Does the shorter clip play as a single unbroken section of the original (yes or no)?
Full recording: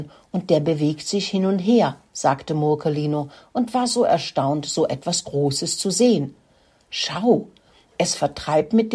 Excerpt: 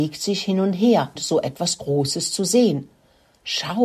no